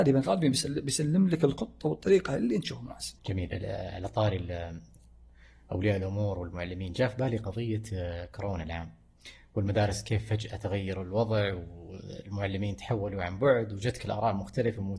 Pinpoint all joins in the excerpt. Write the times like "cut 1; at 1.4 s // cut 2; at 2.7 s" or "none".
cut 1; at 3.2 s